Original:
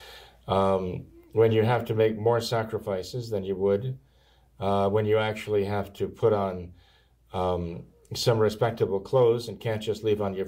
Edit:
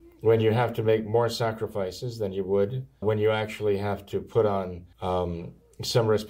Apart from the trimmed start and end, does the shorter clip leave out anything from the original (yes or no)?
yes